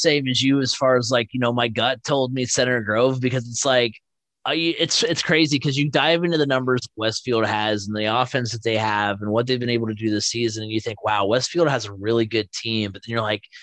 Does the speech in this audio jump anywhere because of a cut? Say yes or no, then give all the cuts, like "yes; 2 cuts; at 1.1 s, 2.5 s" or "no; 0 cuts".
no; 0 cuts